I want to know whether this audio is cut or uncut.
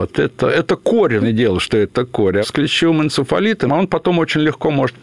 cut